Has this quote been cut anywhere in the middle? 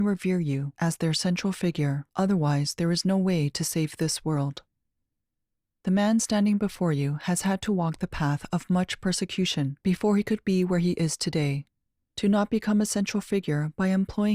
yes; 2 cuts; at 2.1 s, 12.0 s

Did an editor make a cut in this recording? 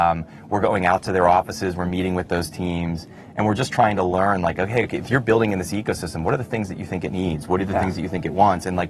no; 0 cuts

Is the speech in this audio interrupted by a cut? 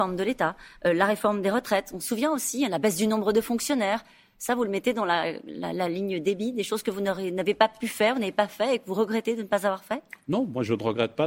no; 0 cuts

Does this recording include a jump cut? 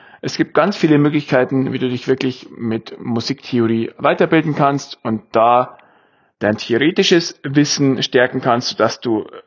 no; 0 cuts

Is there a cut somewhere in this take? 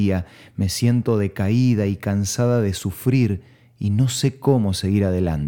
no; 0 cuts

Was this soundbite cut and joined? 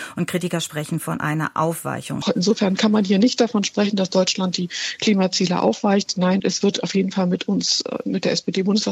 yes; 2 cuts; at 2.2 s, 6.4 s

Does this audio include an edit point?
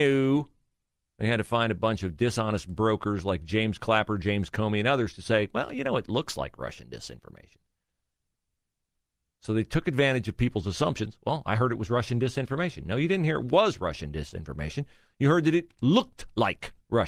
no; 0 cuts

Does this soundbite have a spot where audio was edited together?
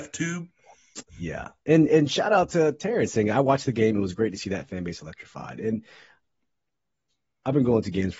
no; 0 cuts

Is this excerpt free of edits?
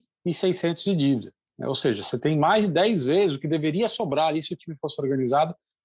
yes; 0 cuts

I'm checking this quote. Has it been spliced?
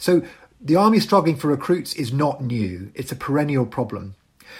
no; 0 cuts

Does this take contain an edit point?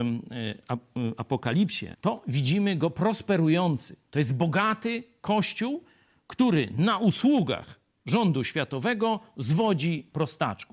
yes; 1 cut; at 1.9 s

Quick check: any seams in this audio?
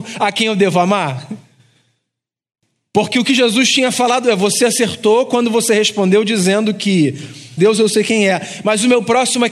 yes; 1 cut; at 7.6 s

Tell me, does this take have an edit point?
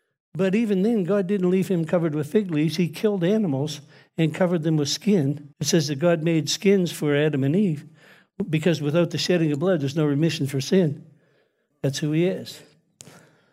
yes; 2 cuts; at 5.5 s, 11.7 s

